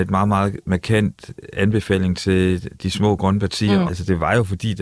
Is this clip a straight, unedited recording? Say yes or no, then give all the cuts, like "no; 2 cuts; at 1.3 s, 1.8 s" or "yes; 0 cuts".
no; 1 cut; at 3.9 s